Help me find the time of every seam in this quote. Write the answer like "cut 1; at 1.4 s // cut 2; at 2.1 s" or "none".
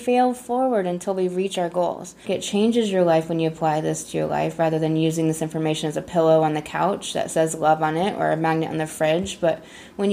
cut 1; at 2.2 s